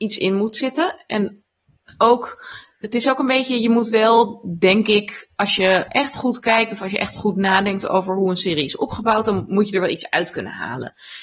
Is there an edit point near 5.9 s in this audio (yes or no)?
yes